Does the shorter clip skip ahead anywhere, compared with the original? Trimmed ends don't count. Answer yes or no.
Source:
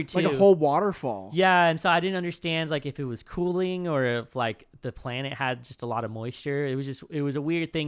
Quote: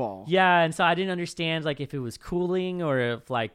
no